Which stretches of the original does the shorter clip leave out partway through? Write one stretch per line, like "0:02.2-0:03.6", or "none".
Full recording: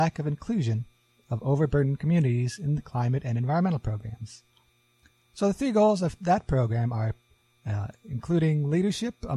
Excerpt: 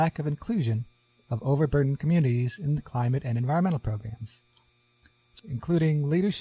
0:05.4-0:08.0

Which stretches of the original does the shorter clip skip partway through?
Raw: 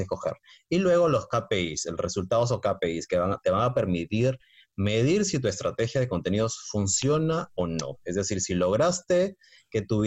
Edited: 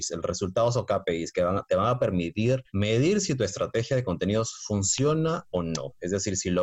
0:04.4-0:04.7

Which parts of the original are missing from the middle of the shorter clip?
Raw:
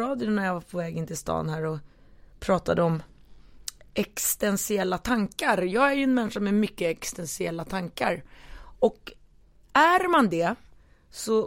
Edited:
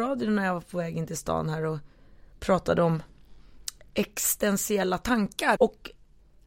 0:05.6-0:08.8

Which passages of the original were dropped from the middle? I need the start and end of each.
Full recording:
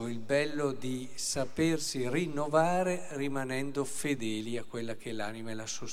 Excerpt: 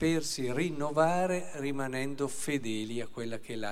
none

